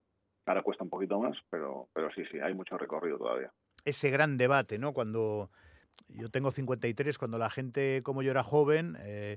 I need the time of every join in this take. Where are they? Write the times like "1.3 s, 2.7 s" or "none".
none